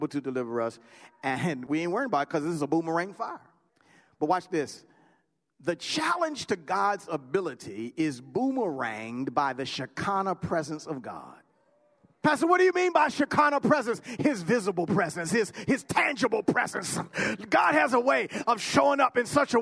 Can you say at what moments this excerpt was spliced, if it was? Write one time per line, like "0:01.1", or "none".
none